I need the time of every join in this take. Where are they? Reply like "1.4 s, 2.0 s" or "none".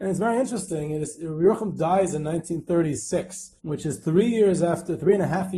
3.6 s